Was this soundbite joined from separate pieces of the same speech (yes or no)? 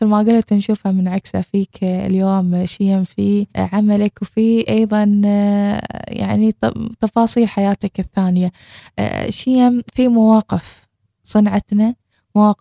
yes